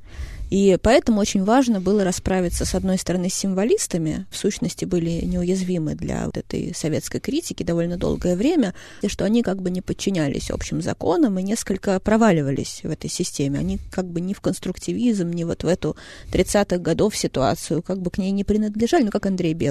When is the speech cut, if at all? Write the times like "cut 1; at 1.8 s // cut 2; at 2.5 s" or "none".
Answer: cut 1; at 4.3 s // cut 2; at 6.3 s // cut 3; at 9.0 s